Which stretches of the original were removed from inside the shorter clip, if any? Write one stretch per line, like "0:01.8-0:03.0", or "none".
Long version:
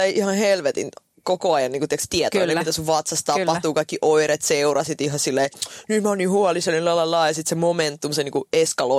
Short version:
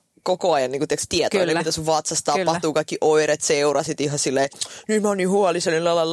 none